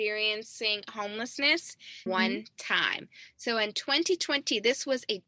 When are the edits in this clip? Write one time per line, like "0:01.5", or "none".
0:02.1